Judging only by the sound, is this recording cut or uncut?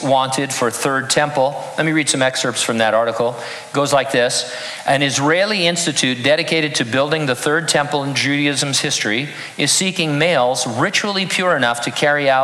uncut